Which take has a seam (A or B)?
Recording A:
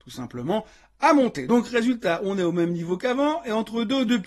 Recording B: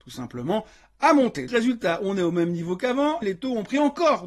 B